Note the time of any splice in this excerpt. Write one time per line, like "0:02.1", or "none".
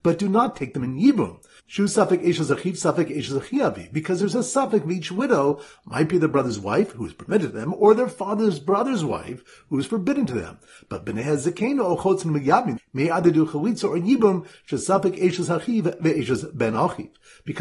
0:12.8